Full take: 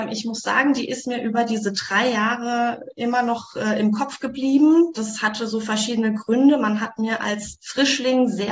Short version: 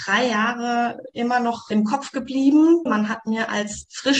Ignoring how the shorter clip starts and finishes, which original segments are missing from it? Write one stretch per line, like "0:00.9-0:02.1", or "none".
0:03.5-0:03.8
0:04.9-0:06.6